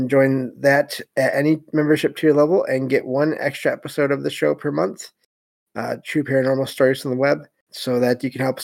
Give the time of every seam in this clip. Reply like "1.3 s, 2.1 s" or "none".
7.7 s